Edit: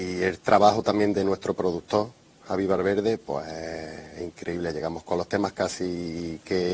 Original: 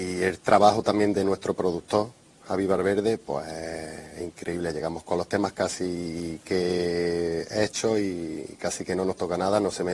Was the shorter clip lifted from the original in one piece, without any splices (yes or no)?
yes